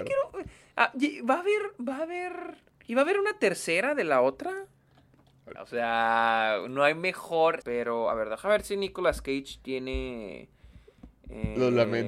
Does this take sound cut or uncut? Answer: cut